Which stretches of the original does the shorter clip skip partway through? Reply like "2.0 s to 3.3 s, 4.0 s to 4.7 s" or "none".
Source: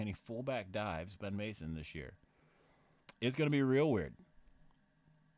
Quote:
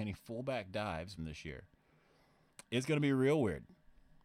1.2 s to 1.7 s